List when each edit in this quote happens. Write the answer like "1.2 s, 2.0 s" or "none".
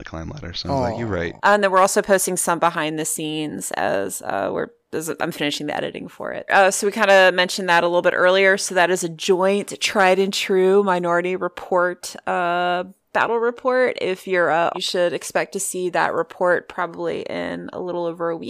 1.4 s, 6.5 s, 14.7 s